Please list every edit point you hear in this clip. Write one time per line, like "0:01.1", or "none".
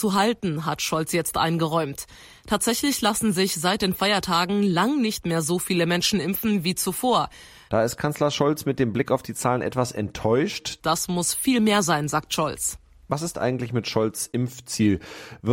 0:07.7
0:10.8

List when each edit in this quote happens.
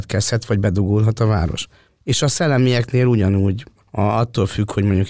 0:02.0
0:03.8

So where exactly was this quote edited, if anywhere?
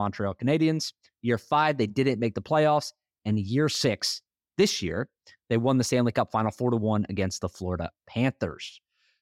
none

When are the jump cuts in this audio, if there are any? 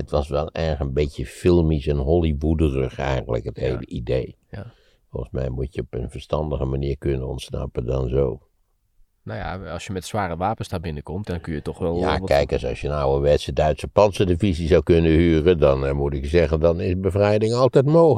0:11.2

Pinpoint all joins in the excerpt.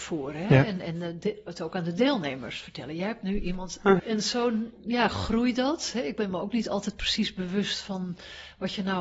0:04.0

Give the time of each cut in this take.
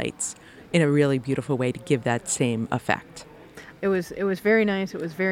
0:03.8

